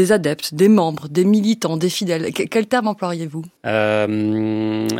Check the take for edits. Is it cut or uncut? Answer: cut